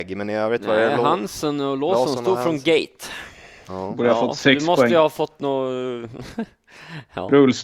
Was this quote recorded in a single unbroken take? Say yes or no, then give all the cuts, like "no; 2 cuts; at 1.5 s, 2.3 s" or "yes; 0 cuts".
no; 1 cut; at 3.6 s